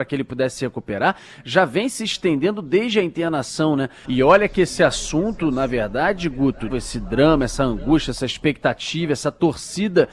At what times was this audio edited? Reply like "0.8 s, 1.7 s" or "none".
4.0 s, 6.7 s